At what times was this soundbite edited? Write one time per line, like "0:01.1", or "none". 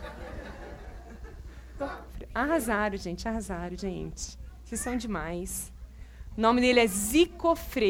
0:01.8
0:06.3